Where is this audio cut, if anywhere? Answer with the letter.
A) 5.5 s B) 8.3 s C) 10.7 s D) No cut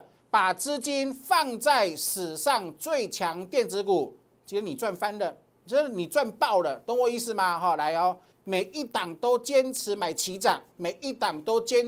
B